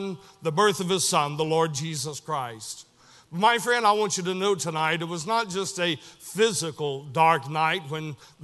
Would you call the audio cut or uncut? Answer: uncut